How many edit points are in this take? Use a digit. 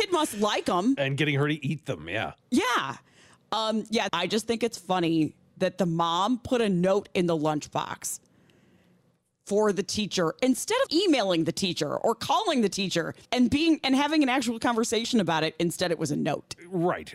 3